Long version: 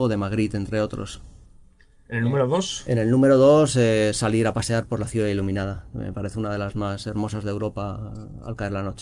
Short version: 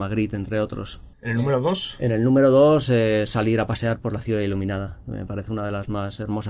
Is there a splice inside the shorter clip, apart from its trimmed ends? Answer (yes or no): yes